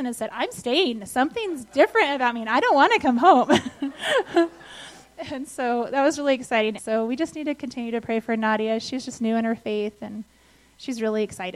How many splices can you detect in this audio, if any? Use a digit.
1